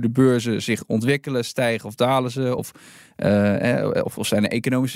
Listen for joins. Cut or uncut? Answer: uncut